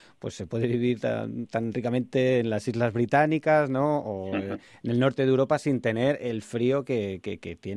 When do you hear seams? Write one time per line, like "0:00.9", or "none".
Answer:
none